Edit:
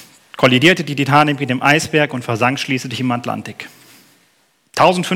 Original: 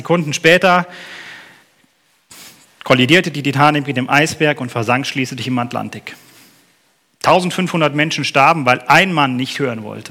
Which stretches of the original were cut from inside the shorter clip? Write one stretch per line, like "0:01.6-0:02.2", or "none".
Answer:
none